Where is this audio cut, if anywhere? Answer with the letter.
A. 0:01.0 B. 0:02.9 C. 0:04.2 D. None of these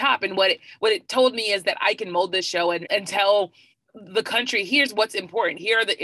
B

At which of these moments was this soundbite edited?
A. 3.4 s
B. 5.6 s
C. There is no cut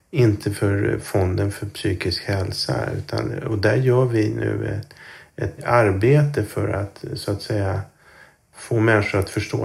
B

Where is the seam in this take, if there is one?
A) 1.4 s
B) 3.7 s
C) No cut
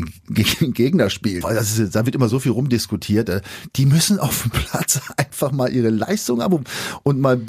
A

